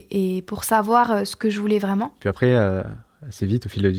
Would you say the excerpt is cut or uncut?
uncut